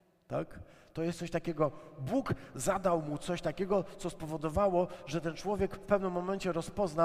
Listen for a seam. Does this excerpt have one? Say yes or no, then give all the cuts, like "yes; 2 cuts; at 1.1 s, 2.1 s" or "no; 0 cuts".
no; 0 cuts